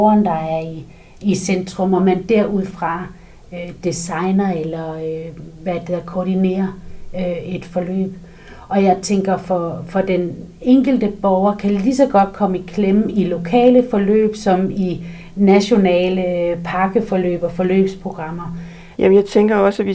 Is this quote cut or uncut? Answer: uncut